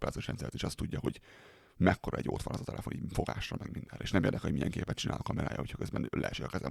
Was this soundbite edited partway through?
no; 0 cuts

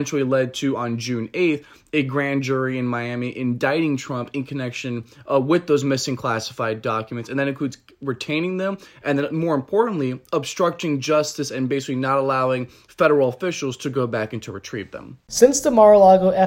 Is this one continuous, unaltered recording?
no; 1 cut; at 15.2 s

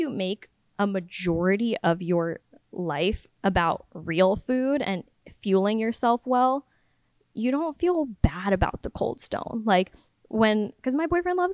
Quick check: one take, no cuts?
yes; 0 cuts

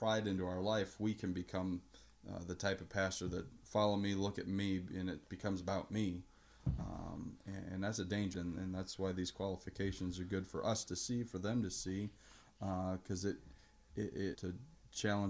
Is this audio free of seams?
no; 2 cuts; at 8.3 s, 14.3 s

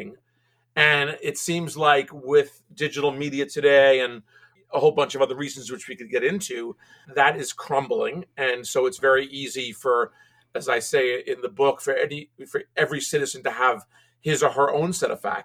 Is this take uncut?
yes; 0 cuts

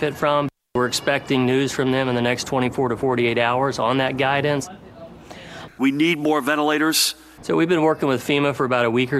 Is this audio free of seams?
no; 2 cuts; at 5.7 s, 7.4 s

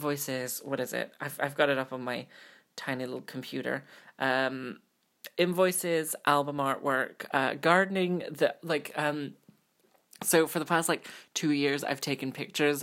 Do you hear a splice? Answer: no; 0 cuts

